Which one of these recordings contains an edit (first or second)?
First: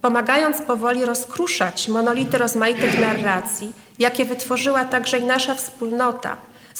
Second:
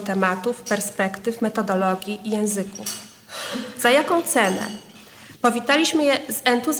second